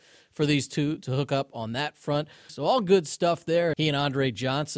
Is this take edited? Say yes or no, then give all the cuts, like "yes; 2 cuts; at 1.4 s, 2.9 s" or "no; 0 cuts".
yes; 2 cuts; at 2.5 s, 3.7 s